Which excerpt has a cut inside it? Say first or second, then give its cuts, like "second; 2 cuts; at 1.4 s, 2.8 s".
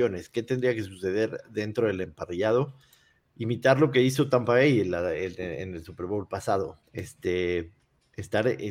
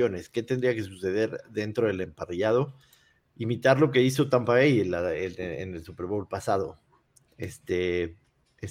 first; 1 cut; at 6.8 s